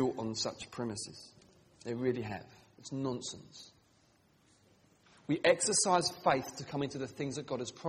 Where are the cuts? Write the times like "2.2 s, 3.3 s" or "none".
none